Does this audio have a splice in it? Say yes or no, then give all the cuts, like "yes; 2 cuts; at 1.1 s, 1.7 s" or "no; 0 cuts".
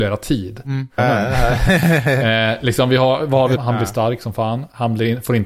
yes; 2 cuts; at 1.0 s, 3.6 s